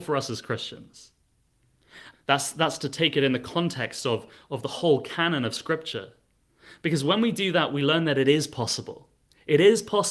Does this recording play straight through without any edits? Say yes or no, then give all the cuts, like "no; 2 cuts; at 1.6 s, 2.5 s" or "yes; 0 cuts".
no; 1 cut; at 2.1 s